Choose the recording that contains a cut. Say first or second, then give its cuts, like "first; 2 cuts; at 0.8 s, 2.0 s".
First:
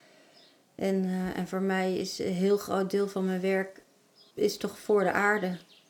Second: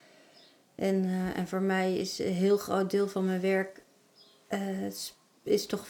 first; 1 cut; at 4.3 s